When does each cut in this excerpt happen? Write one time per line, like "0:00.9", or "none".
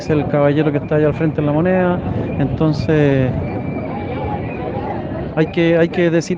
none